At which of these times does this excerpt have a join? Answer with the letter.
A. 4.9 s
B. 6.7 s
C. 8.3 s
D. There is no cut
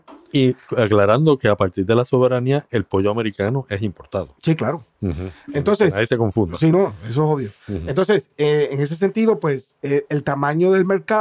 D